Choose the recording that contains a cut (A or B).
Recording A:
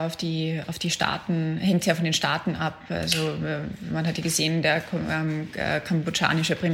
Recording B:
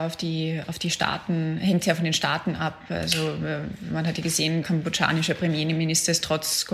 B